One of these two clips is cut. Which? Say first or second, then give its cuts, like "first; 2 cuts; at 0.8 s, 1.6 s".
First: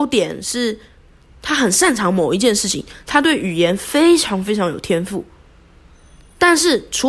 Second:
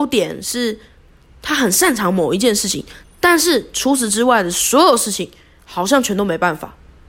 second; 1 cut; at 3.0 s